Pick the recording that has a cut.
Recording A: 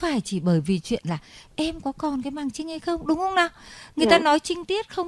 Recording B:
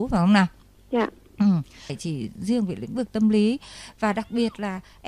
B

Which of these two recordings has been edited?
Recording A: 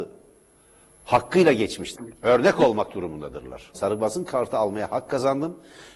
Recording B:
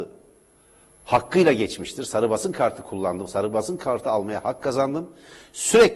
A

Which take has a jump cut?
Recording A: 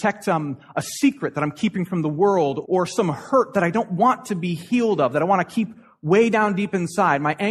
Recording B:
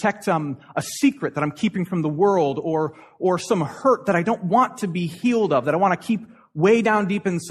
A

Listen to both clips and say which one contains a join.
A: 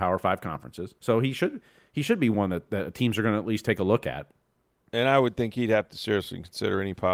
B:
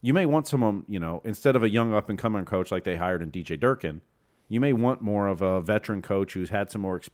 A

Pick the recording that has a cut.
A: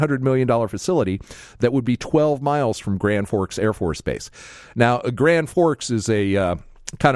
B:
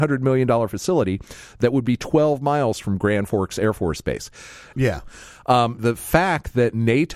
B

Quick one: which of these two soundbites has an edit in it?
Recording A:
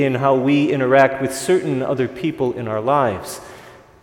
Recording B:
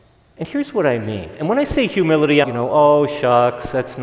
B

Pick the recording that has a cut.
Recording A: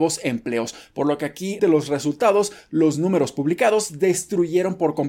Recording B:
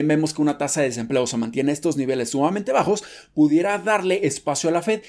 A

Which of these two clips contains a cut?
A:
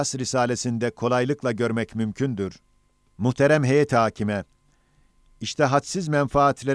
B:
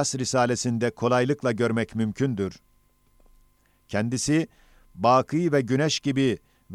A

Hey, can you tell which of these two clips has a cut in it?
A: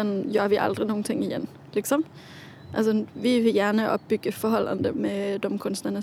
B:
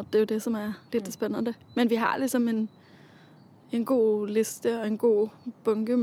A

